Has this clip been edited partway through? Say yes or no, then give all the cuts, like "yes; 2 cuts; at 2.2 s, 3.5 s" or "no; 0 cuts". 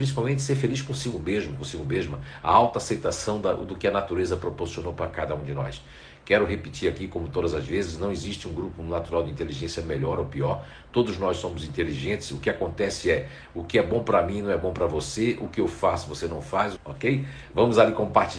yes; 1 cut; at 16.8 s